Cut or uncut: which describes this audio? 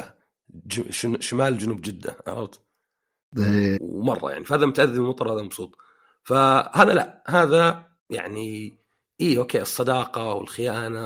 cut